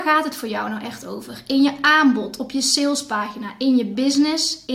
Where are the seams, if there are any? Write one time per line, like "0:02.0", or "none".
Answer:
none